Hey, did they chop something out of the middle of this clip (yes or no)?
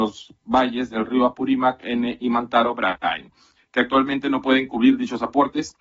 no